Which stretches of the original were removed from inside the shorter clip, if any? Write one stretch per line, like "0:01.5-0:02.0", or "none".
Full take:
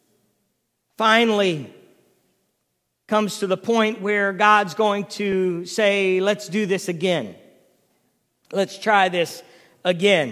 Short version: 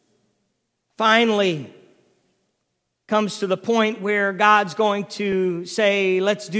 none